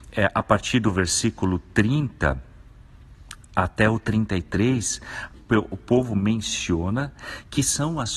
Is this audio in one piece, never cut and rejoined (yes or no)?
no